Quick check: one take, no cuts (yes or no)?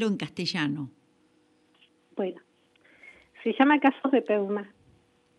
yes